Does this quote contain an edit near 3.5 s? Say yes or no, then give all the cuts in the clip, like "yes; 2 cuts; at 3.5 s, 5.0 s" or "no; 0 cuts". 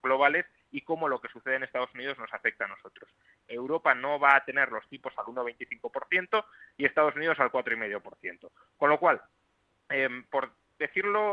yes; 1 cut; at 3.5 s